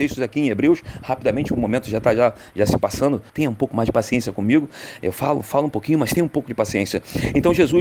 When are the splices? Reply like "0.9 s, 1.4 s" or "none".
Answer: 3.3 s